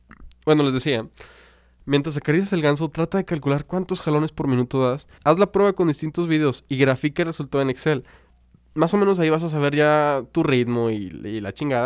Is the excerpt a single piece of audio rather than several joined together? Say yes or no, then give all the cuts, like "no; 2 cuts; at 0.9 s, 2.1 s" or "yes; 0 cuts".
no; 1 cut; at 5.2 s